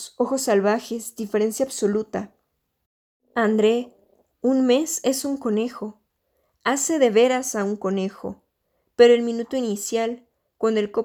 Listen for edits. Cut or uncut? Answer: uncut